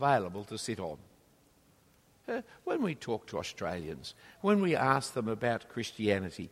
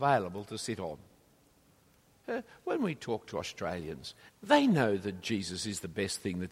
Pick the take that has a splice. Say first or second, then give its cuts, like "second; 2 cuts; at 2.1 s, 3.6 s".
second; 1 cut; at 4.3 s